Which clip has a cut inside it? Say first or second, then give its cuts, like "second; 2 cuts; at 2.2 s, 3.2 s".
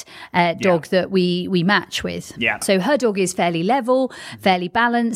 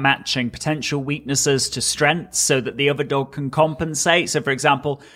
first; 1 cut; at 2.6 s